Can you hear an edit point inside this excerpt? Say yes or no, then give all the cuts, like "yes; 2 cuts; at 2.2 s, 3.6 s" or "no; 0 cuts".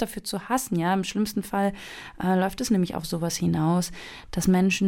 no; 0 cuts